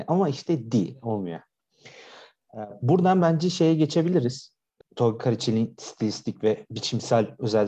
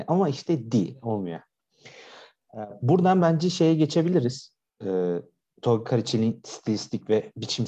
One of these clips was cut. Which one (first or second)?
first